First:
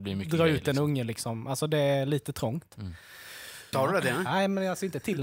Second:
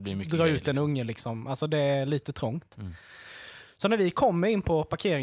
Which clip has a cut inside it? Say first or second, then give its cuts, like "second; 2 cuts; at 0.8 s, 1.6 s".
first; 1 cut; at 3.7 s